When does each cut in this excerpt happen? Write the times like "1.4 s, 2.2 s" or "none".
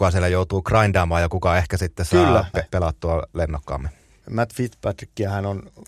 2.5 s, 4.2 s